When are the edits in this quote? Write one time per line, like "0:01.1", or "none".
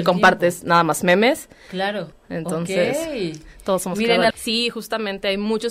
0:02.1
0:04.3